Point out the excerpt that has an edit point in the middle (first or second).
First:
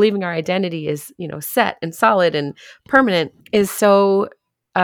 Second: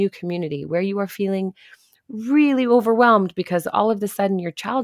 first